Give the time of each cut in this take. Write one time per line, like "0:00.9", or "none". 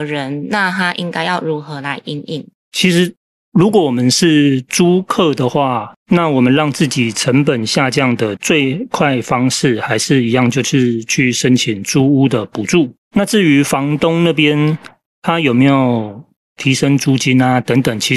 0:08.4